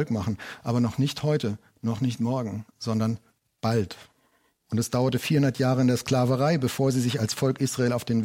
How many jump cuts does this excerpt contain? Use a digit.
0